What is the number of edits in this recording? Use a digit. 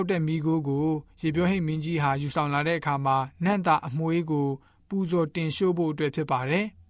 0